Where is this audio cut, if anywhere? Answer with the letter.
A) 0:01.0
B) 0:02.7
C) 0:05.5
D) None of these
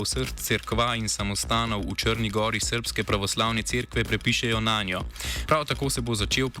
C